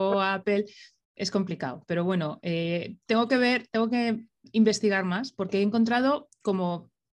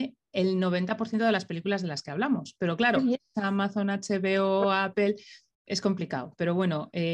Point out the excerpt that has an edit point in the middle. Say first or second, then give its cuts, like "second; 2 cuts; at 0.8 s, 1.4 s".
second; 1 cut; at 3.3 s